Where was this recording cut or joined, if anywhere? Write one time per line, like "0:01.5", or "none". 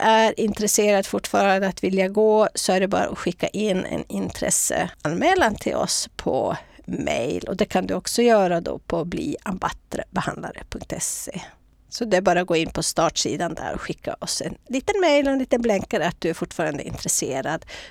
none